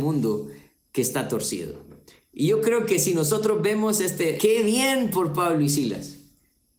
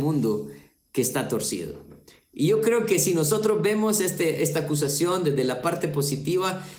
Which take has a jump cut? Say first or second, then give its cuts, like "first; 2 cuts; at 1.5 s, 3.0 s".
first; 1 cut; at 4.4 s